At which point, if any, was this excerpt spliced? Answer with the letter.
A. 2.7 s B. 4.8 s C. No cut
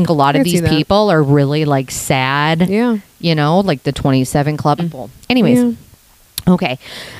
B